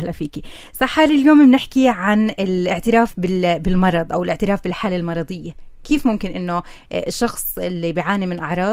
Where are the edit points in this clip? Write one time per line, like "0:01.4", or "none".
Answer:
none